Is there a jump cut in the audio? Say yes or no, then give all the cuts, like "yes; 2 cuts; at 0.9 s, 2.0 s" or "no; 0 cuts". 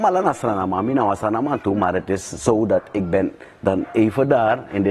no; 0 cuts